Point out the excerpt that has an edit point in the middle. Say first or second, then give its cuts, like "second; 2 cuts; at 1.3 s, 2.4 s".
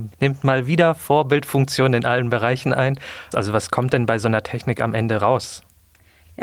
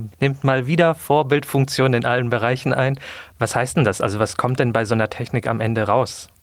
first; 1 cut; at 3.3 s